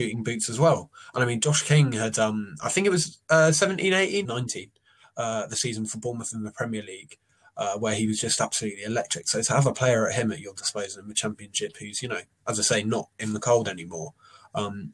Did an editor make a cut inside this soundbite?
yes; 1 cut; at 4.2 s

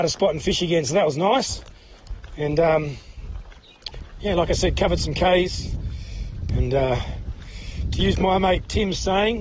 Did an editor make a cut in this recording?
yes; 1 cut; at 6.5 s

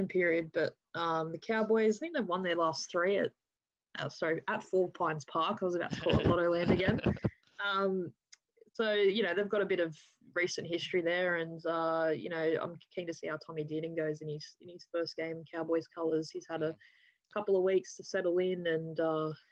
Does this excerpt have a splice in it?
no; 0 cuts

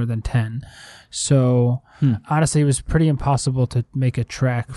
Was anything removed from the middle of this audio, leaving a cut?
no; 0 cuts

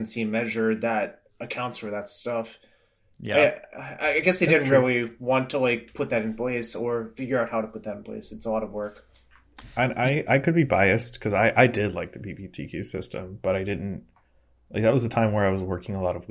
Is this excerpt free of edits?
yes; 0 cuts

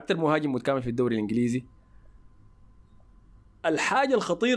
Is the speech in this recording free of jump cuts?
yes; 0 cuts

